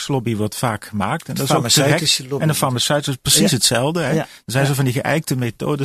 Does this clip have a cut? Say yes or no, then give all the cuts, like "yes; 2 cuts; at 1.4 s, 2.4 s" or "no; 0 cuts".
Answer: no; 0 cuts